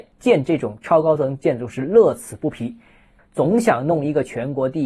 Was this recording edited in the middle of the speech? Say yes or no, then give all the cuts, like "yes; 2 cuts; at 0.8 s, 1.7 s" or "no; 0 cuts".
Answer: yes; 1 cut; at 3.2 s